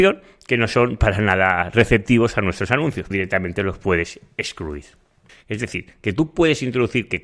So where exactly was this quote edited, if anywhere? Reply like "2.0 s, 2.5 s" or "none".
3.1 s, 5.3 s